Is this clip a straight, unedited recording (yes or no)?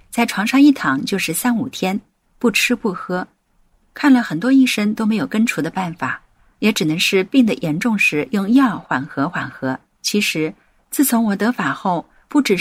no